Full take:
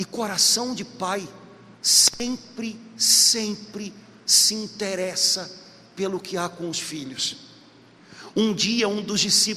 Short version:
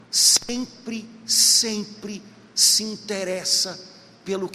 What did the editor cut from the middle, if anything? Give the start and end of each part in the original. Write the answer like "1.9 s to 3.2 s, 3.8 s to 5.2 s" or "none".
none